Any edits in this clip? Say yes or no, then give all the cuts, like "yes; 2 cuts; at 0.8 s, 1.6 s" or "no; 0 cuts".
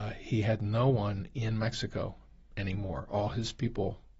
no; 0 cuts